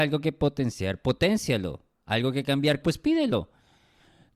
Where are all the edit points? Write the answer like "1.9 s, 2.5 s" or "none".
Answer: 2.8 s